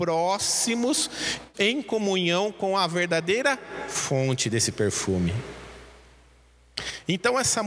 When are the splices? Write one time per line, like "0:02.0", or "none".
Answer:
0:01.5